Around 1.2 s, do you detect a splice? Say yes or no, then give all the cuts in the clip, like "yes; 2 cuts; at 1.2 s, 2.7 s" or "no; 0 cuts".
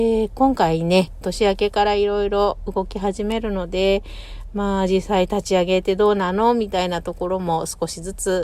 yes; 1 cut; at 1.2 s